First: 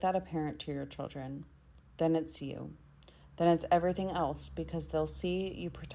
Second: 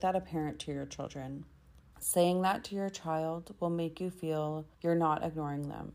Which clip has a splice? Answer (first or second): second